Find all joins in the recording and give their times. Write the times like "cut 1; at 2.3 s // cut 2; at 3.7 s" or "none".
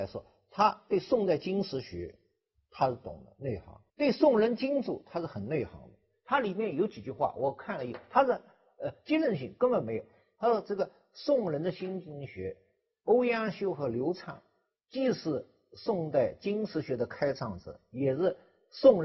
cut 1; at 3.9 s